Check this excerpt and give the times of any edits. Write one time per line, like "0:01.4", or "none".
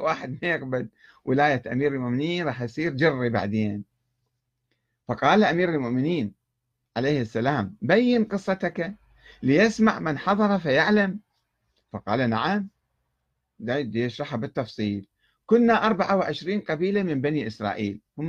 none